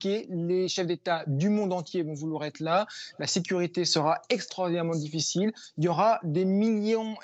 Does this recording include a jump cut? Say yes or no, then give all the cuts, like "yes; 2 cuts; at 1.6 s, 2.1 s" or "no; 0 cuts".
no; 0 cuts